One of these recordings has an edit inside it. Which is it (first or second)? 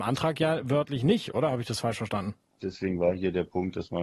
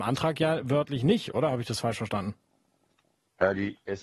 first